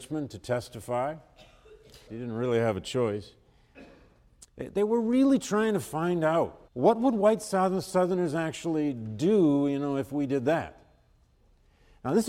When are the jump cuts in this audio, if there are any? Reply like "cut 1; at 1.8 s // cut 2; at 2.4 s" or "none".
cut 1; at 2.1 s // cut 2; at 4.5 s // cut 3; at 6.7 s